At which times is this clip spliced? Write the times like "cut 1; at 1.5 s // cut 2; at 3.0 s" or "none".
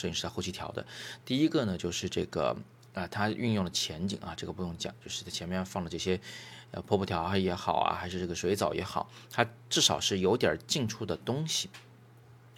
cut 1; at 1.2 s

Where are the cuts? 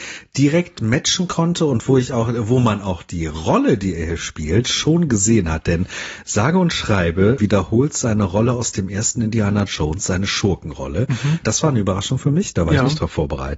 cut 1; at 7.4 s // cut 2; at 11.4 s

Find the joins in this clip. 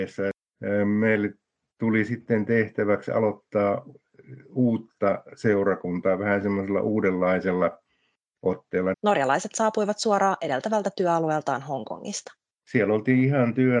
cut 1; at 8.9 s

